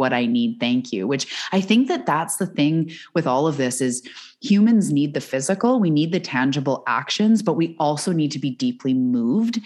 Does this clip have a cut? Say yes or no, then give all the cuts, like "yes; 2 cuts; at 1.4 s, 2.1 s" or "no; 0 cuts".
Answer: no; 0 cuts